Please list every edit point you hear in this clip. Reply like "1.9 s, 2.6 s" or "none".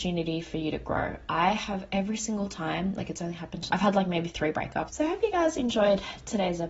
3.7 s, 4.9 s